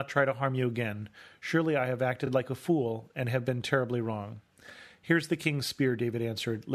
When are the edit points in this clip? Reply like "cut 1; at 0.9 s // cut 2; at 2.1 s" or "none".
none